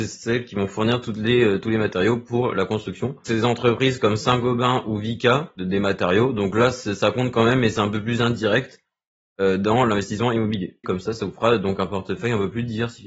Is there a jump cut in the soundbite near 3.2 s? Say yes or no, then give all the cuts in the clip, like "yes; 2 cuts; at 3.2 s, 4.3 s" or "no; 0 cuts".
no; 2 cuts; at 5.6 s, 10.8 s